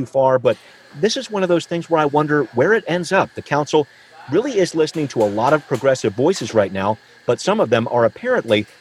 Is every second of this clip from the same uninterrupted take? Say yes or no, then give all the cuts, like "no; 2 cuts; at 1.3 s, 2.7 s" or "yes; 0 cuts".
yes; 0 cuts